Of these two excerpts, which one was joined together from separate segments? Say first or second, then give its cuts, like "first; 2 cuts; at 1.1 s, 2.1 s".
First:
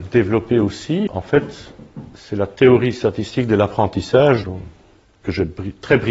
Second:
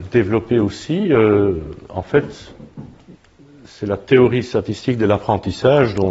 first; 3 cuts; at 1.1 s, 2.1 s, 4.4 s